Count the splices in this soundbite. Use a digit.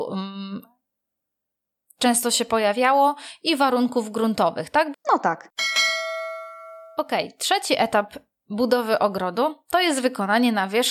1